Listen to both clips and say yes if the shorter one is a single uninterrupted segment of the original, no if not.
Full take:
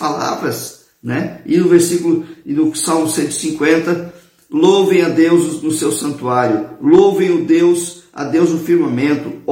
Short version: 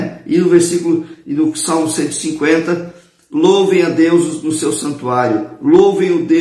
yes